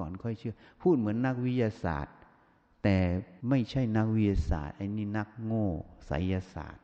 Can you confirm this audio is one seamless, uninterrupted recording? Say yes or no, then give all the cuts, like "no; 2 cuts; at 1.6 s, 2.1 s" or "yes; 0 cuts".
no; 1 cut; at 3.4 s